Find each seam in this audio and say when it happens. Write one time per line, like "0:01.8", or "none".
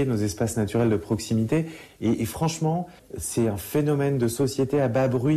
0:01.9